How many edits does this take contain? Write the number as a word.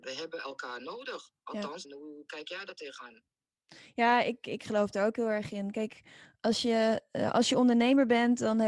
one